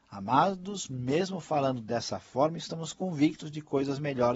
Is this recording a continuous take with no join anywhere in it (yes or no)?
yes